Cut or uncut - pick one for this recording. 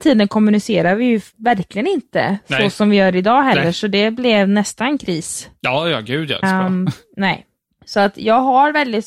cut